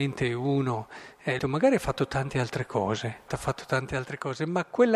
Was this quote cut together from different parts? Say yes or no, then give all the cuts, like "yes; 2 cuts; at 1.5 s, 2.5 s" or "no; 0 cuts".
yes; 2 cuts; at 1.4 s, 3.3 s